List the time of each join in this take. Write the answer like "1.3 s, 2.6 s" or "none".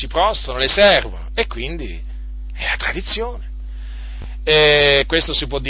none